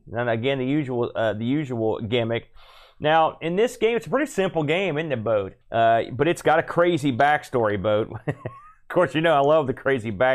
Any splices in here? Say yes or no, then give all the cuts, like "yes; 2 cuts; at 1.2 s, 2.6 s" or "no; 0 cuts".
yes; 1 cut; at 5.6 s